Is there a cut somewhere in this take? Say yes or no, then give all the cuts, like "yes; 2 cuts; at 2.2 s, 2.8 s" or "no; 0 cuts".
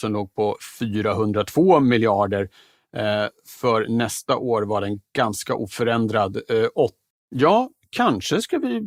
yes; 1 cut; at 7.1 s